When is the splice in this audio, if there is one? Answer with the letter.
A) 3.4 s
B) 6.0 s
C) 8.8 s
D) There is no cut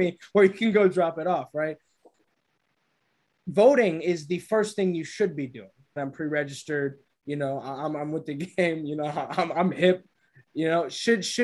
B